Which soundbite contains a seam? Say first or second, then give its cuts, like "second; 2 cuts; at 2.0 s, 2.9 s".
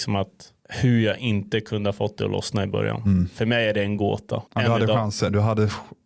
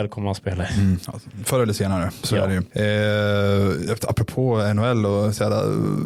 first; 1 cut; at 4.5 s